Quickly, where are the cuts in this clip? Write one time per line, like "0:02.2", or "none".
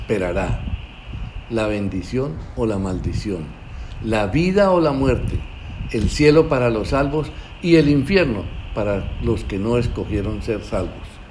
none